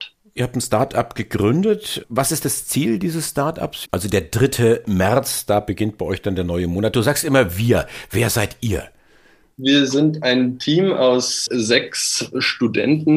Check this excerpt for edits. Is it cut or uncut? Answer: cut